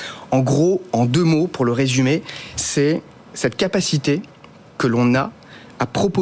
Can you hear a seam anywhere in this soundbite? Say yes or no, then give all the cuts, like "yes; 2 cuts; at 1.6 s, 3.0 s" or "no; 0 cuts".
no; 0 cuts